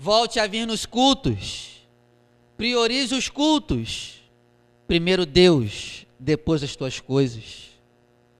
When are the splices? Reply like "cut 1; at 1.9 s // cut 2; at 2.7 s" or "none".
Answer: none